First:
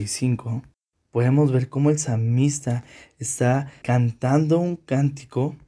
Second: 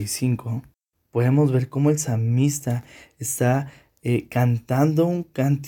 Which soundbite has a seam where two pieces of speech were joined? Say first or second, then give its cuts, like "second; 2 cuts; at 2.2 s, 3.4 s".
first; 1 cut; at 3.8 s